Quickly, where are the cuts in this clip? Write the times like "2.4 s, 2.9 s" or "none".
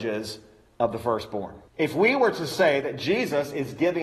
1.7 s